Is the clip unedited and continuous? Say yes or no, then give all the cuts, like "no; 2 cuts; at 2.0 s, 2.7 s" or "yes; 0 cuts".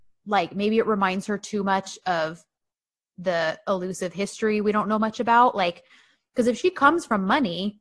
yes; 0 cuts